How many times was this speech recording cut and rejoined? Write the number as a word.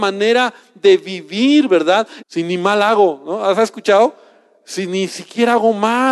one